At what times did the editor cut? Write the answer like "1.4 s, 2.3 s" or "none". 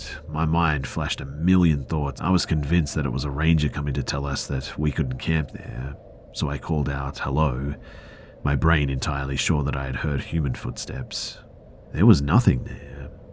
2.2 s, 11.8 s